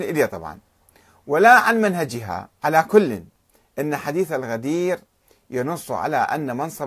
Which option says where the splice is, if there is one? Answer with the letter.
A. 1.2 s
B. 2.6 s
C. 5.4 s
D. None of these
B